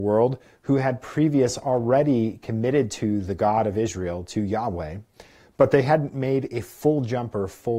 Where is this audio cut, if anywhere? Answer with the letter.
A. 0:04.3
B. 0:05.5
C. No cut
C